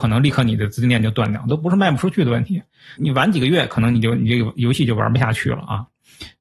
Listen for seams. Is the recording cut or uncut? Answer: cut